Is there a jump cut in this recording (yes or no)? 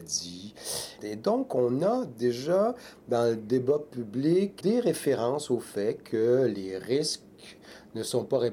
yes